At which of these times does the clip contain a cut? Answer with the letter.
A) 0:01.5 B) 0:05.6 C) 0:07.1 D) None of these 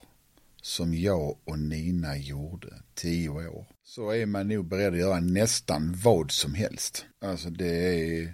C